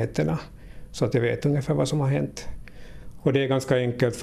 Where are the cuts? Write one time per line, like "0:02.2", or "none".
0:03.2